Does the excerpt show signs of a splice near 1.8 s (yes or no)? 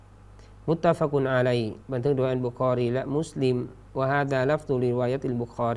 yes